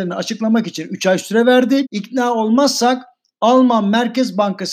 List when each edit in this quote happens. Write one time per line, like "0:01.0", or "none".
0:01.8